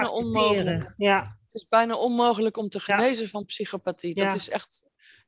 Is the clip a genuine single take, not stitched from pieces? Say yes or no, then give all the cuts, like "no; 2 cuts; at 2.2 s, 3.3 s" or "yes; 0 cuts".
yes; 0 cuts